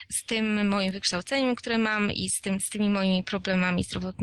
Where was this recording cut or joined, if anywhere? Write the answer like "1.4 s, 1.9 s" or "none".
2.6 s